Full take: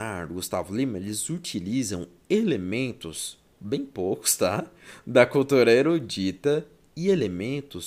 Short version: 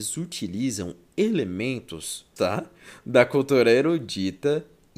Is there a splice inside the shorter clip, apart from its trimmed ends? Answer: yes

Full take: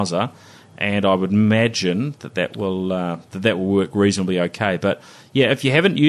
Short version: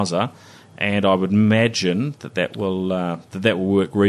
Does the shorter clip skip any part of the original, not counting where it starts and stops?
no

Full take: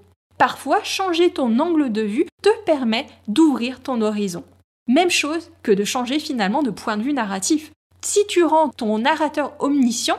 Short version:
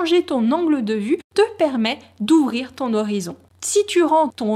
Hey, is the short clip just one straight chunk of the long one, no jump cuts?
no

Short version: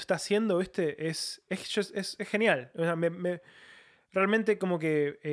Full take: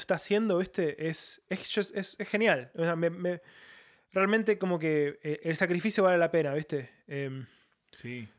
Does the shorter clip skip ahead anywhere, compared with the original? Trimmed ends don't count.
no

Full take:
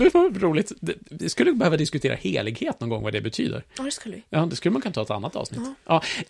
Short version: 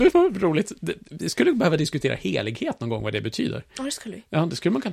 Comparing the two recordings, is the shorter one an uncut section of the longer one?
yes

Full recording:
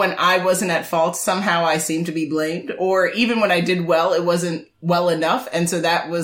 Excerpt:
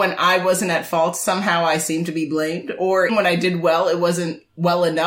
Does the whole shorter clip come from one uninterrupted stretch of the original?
no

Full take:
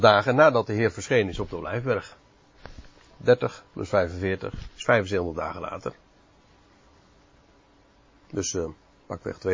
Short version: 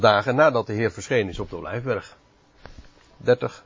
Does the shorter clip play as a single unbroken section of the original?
yes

